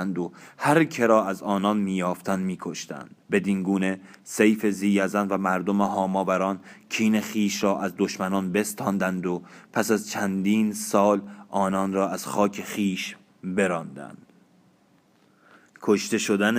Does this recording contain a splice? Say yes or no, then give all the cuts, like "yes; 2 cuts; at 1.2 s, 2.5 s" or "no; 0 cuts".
yes; 1 cut; at 3.2 s